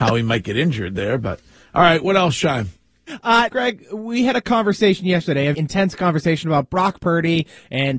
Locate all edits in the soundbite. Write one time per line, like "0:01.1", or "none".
0:03.5
0:05.5